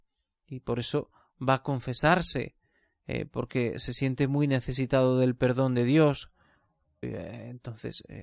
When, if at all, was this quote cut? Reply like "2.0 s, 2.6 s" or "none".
7.0 s